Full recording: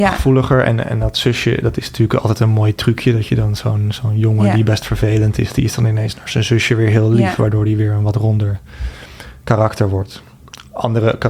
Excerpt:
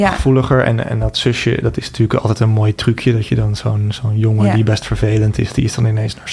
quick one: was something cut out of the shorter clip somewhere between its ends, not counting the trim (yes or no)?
no